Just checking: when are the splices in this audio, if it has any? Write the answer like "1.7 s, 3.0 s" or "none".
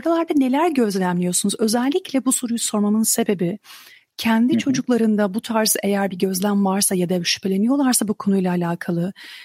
none